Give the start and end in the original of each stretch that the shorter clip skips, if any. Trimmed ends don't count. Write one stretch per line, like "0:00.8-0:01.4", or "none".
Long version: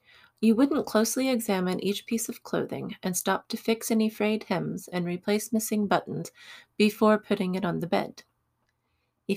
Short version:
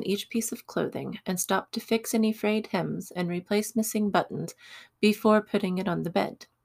none